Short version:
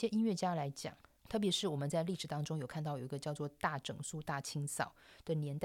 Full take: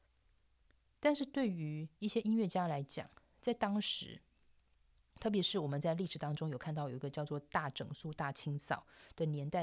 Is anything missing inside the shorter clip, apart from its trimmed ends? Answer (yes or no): yes